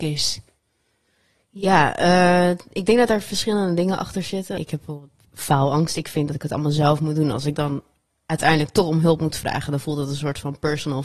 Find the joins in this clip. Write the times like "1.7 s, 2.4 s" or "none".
4.6 s